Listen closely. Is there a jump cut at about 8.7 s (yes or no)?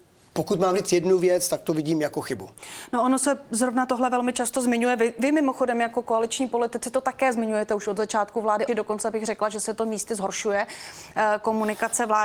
yes